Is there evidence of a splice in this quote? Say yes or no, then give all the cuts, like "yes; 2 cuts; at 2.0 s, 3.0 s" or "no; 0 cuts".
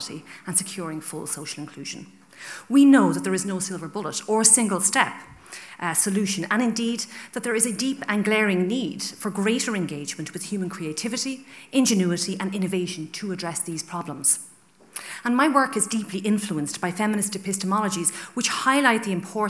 no; 0 cuts